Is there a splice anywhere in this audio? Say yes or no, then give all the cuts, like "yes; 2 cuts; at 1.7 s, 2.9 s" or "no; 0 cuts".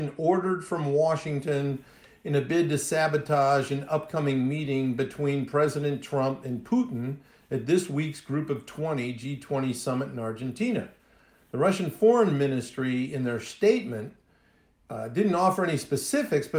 no; 0 cuts